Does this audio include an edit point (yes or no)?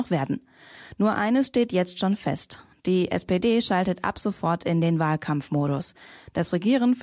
no